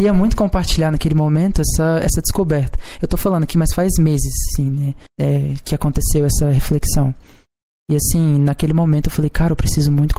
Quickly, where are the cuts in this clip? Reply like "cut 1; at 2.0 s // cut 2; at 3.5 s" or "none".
cut 1; at 5.1 s